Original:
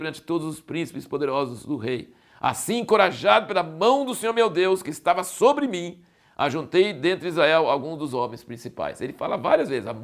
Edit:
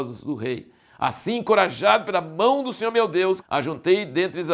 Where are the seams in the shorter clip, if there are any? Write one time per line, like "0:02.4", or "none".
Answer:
0:03.4